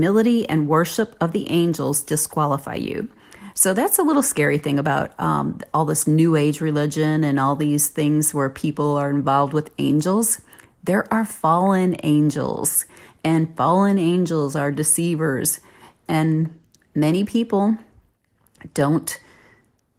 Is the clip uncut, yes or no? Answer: no